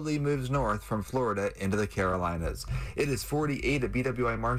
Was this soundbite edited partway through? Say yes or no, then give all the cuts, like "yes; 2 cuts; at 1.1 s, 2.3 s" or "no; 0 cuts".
no; 0 cuts